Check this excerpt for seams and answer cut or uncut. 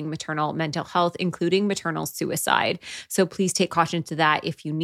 uncut